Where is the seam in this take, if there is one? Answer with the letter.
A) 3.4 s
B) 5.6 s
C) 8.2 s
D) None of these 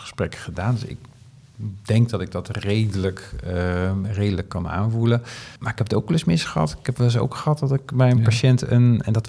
B